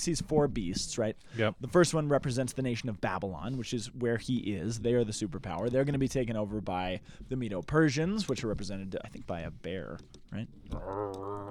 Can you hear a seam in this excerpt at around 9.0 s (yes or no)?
yes